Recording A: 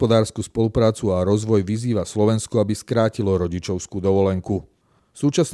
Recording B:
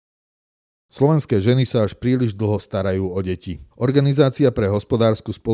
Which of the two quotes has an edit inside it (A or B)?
B